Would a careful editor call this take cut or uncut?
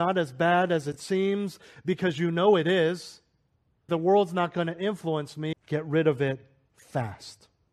cut